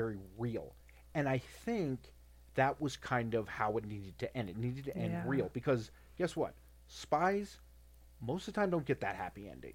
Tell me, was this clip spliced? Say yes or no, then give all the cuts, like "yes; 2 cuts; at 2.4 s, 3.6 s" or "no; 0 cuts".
no; 0 cuts